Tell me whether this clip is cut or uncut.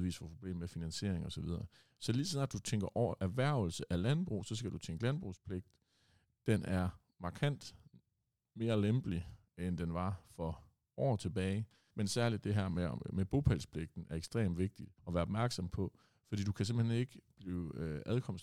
cut